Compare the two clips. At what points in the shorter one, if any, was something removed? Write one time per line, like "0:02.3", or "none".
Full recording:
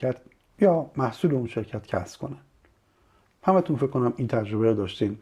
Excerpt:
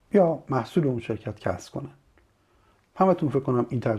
none

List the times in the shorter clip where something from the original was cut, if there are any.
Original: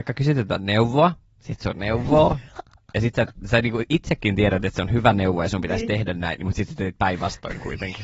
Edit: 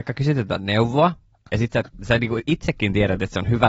0:01.3

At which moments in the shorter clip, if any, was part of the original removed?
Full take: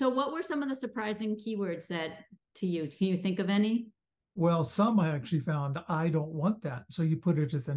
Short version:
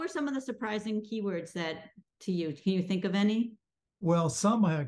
none

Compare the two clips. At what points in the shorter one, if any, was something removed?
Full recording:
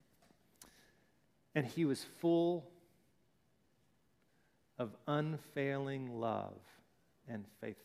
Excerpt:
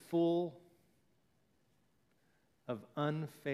none

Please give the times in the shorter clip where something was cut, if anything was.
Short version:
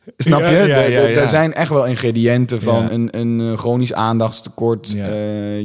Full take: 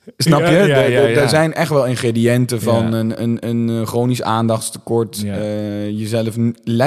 0:02.9

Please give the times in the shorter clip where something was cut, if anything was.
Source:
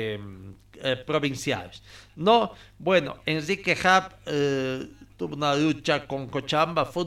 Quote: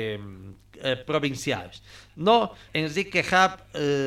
0:02.7

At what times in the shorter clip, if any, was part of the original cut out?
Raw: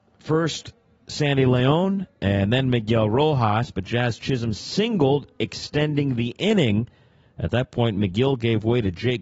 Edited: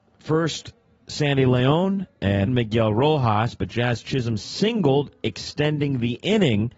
0:02.5

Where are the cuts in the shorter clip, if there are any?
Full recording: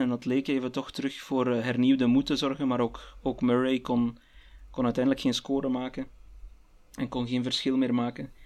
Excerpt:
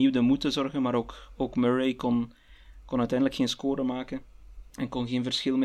0:04.7

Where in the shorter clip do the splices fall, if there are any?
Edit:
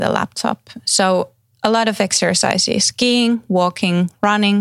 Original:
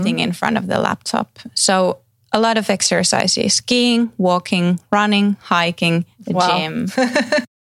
none

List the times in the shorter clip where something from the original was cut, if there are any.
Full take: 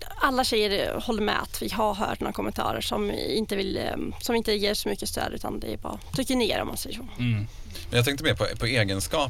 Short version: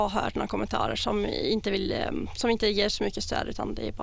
none

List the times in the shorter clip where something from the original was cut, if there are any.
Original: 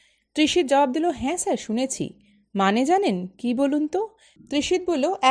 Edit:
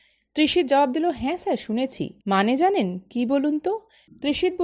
0:02.2

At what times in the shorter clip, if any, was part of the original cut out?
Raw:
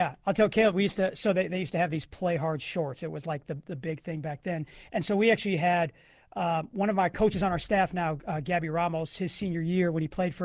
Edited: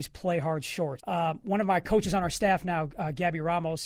0:01.0

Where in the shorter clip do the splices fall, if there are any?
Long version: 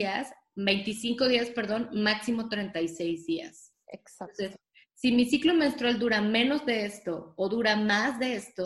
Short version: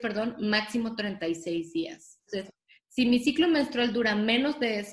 0:02.3

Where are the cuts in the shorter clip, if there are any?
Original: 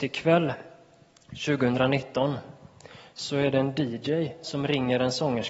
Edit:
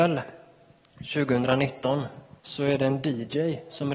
0:02.4

